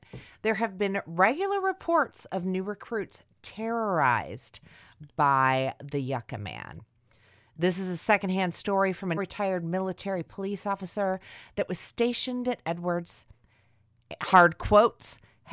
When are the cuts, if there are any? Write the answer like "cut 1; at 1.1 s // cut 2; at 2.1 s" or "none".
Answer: cut 1; at 9.2 s